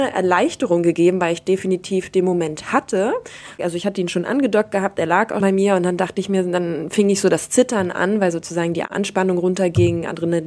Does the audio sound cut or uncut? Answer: cut